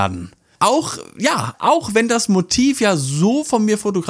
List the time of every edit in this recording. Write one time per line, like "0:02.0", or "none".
none